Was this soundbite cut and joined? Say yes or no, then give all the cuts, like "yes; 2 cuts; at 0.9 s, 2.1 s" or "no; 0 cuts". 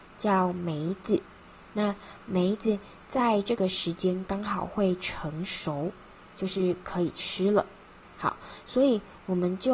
no; 0 cuts